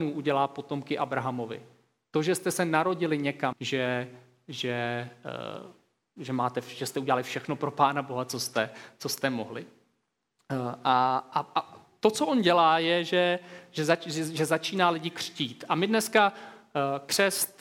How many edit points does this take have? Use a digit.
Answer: 1